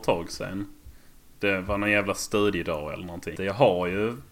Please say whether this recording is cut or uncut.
cut